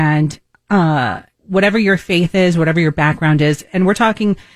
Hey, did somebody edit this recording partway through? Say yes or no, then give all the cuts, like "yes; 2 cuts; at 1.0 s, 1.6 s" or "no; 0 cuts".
yes; 1 cut; at 1.3 s